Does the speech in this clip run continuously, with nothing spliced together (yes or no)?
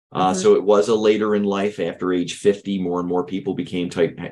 yes